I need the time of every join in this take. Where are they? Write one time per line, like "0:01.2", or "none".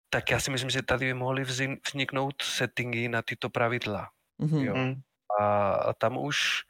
none